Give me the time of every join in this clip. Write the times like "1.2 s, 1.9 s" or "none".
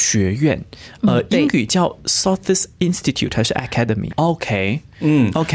4.1 s